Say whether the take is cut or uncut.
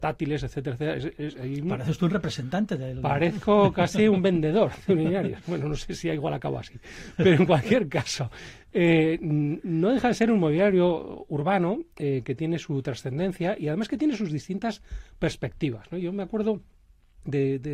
uncut